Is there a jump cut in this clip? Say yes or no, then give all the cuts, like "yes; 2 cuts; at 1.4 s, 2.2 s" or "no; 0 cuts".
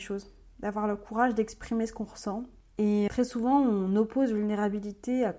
yes; 1 cut; at 3.1 s